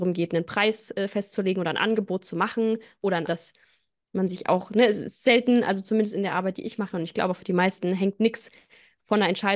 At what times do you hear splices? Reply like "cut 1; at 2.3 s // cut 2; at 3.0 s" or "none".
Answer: cut 1; at 3.3 s

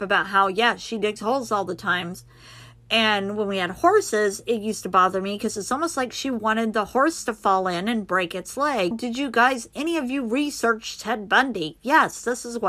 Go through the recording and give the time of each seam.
cut 1; at 8.9 s

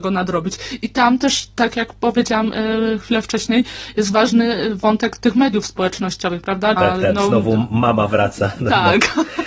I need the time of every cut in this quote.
cut 1; at 5.2 s // cut 2; at 6.8 s

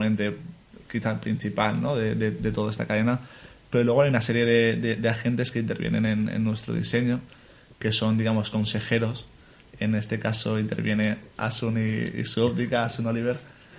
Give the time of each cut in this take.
none

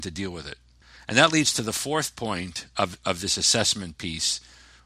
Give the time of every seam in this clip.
none

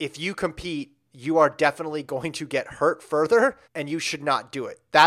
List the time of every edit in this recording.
cut 1; at 3.7 s

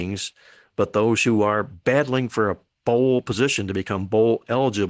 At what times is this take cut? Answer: none

